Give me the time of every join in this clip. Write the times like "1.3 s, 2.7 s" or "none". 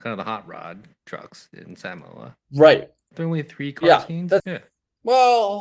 2.4 s, 4.4 s

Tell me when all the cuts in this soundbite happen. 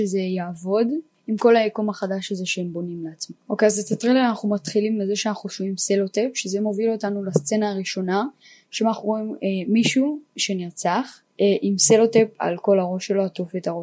3.4 s, 11.3 s

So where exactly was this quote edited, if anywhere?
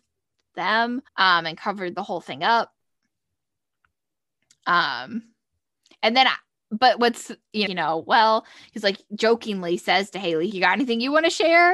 1.1 s, 7.7 s, 10.5 s

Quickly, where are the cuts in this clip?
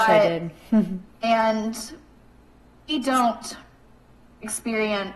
1.1 s

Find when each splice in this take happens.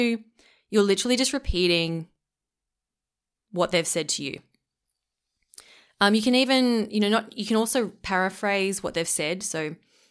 none

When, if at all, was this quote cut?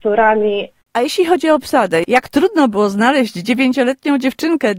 none

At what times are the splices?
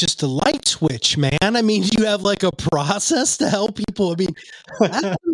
none

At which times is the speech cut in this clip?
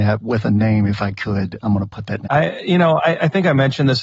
2.3 s

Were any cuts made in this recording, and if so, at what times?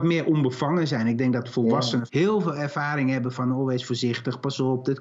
2.1 s

